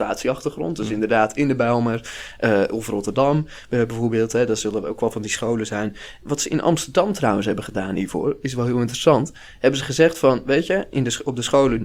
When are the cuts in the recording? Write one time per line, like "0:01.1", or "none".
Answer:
none